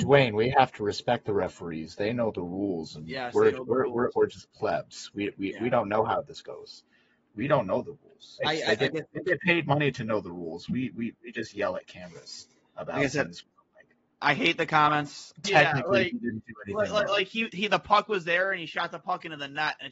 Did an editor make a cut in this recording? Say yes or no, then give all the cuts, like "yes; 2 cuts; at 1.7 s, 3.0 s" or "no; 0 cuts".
yes; 2 cuts; at 8.4 s, 15.4 s